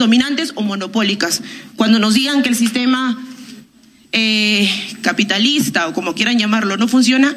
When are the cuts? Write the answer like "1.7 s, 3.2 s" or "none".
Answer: none